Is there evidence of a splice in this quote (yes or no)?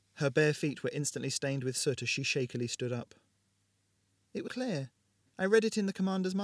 yes